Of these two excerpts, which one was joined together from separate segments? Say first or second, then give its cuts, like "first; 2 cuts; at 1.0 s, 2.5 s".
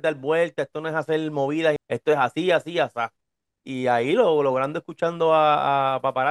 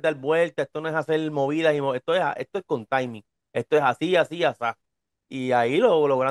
first; 1 cut; at 1.8 s